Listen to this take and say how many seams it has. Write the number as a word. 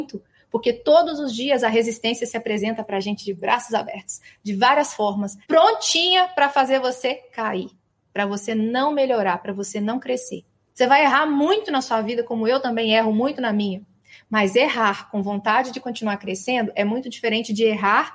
two